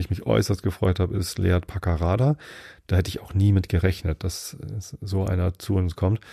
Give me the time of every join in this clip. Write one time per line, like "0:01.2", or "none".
none